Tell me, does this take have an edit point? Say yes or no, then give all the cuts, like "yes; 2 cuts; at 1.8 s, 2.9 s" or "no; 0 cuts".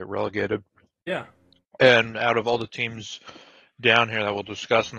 no; 0 cuts